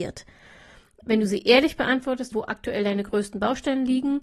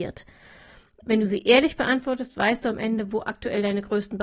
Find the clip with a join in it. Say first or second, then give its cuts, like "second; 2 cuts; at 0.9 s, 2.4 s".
first; 1 cut; at 2.3 s